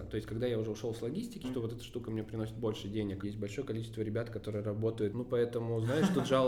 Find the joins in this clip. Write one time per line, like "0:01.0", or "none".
0:01.4
0:03.2
0:05.1